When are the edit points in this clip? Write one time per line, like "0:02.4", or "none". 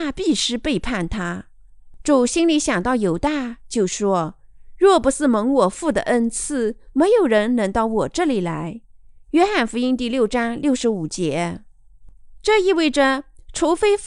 none